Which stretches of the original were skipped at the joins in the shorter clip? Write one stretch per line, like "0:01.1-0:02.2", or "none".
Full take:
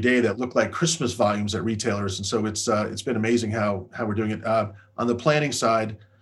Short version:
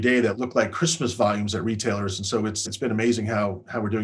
0:02.7-0:02.9